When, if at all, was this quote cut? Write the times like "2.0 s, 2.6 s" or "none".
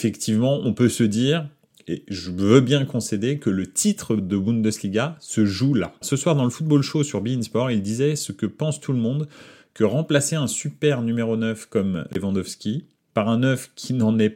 6.0 s